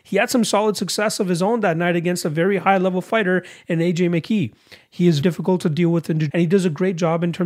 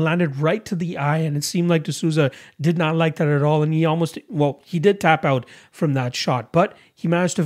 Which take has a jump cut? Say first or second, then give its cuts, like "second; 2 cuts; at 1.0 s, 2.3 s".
first; 2 cuts; at 5.2 s, 6.3 s